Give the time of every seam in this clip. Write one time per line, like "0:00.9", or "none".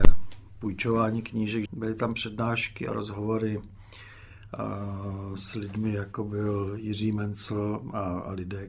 0:01.7